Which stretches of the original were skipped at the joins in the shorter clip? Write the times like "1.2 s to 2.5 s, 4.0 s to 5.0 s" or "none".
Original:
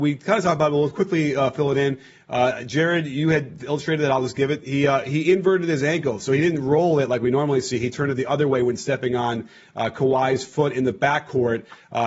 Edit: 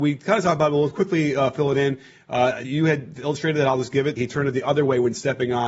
2.6 s to 3.1 s, 4.6 s to 7.8 s